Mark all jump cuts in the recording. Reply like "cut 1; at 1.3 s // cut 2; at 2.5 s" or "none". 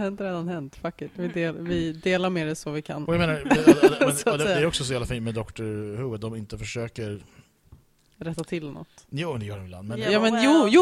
none